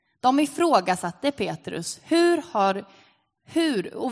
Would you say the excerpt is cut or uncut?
uncut